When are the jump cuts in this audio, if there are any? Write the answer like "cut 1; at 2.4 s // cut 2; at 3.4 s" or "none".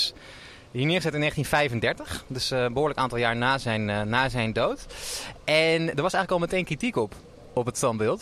none

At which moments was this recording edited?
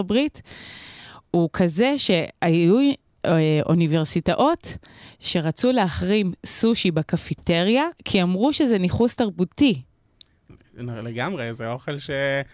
none

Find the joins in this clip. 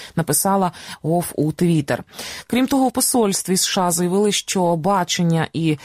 none

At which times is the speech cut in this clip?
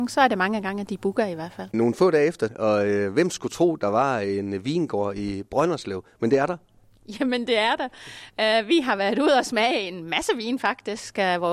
cut 1; at 2.5 s

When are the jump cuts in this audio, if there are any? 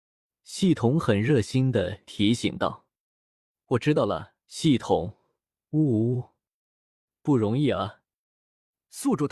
cut 1; at 4.5 s // cut 2; at 7.1 s

